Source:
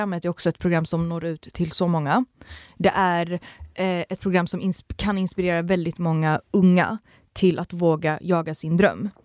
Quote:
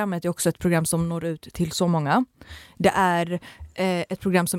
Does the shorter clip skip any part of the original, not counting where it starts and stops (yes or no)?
no